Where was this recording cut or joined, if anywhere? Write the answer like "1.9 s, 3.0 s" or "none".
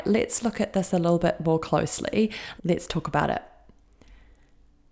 2.6 s